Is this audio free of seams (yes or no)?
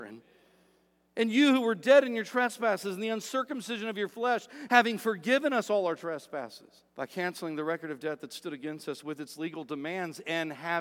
no